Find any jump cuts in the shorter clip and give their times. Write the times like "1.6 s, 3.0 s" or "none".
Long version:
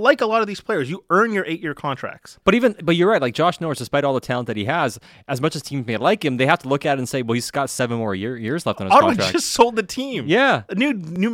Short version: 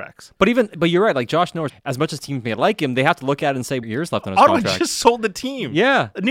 1.7 s, 3.8 s